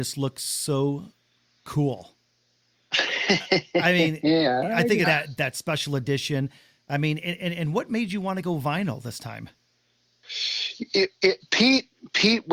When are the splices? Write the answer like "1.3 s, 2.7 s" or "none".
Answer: 5.0 s, 11.4 s